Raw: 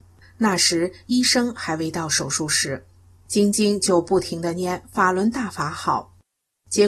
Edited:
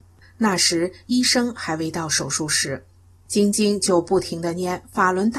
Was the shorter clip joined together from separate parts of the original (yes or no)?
no